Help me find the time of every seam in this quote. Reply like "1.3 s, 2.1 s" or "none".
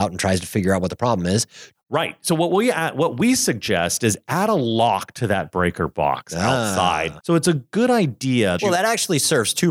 1.7 s, 7.2 s, 8.6 s